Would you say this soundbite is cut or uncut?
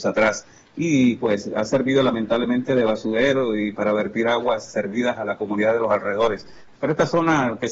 cut